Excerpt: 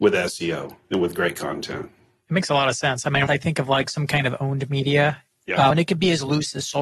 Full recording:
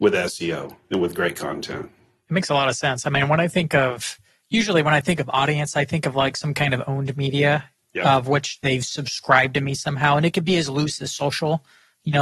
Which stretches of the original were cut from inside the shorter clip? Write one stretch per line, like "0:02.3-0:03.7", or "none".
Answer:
0:03.3-0:05.7
0:08.2-0:10.2